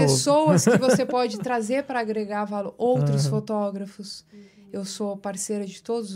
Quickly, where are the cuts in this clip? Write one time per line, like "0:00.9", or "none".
none

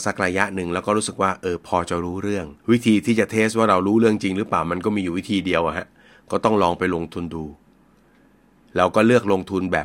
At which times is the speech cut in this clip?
0:02.6

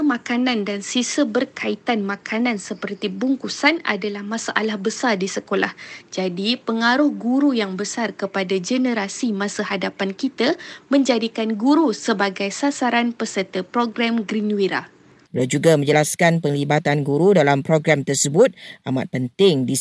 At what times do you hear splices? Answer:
0:06.0
0:15.3

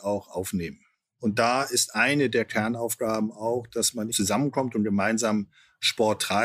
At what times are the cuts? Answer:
0:01.2
0:04.1

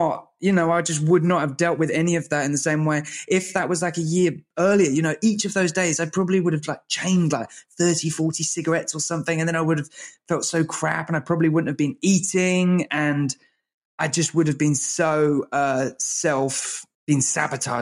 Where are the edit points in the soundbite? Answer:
none

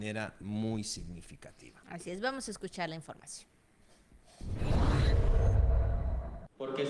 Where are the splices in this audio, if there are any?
none

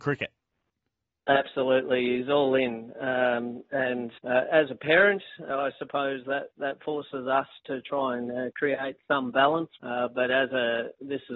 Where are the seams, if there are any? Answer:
0:04.2
0:09.8

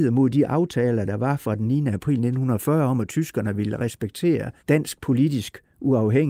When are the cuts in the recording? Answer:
0:04.6

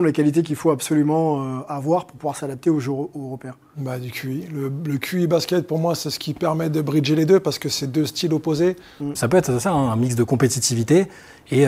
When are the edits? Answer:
0:09.2

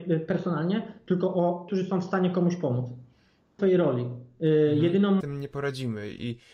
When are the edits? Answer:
0:01.7
0:03.6
0:05.2

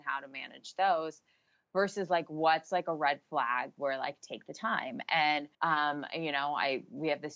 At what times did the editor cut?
0:05.5

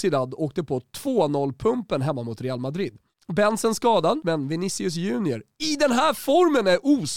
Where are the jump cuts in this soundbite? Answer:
0:04.2

